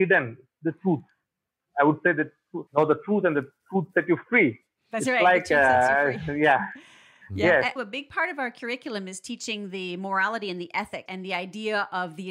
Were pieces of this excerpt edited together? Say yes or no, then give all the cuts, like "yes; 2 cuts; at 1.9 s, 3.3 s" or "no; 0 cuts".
yes; 3 cuts; at 2.7 s, 7.8 s, 11.1 s